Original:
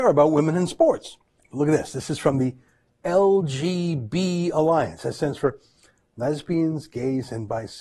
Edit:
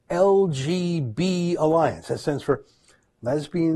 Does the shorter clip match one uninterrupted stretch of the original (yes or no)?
yes